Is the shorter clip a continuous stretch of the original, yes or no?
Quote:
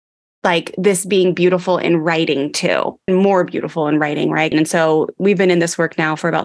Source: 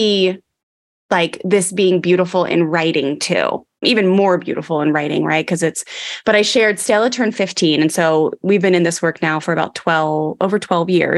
no